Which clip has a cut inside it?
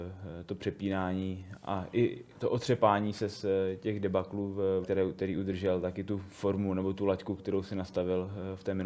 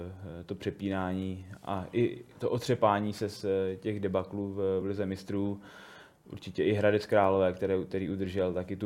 first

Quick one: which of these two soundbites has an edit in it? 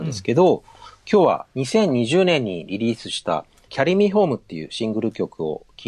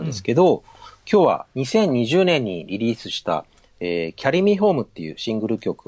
first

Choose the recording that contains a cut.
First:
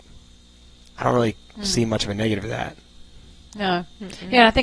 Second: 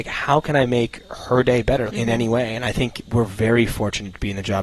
second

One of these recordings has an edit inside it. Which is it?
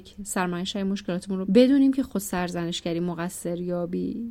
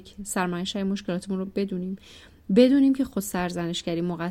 first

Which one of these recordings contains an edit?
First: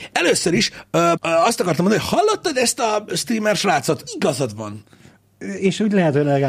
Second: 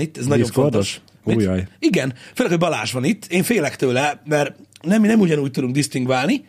first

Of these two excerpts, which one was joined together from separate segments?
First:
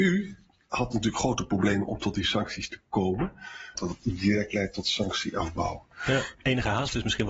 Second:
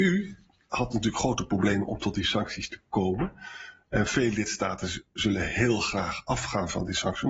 first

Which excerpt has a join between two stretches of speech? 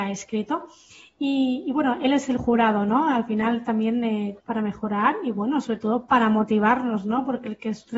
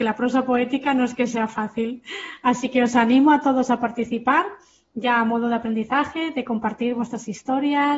first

